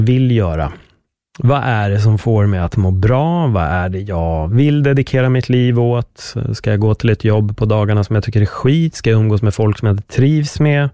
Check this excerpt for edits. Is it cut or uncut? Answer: uncut